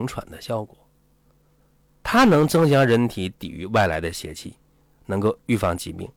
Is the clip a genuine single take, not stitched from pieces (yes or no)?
yes